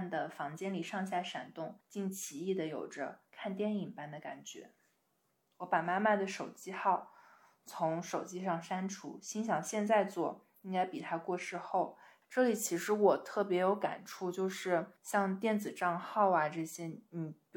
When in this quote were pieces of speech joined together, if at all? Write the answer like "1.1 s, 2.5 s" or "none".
1.8 s, 12.2 s, 15.0 s